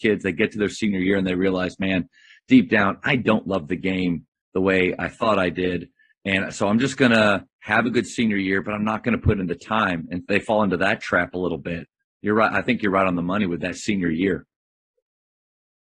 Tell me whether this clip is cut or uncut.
uncut